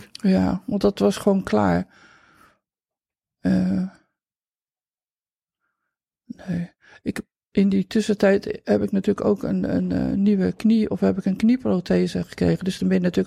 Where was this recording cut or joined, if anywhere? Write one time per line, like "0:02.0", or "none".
none